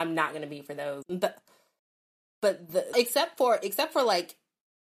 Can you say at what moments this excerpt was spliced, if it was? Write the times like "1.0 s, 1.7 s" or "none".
1.0 s, 2.9 s